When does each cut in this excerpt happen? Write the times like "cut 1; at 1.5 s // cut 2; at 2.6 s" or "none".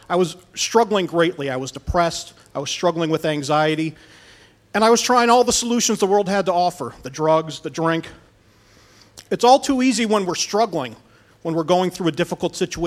cut 1; at 9.2 s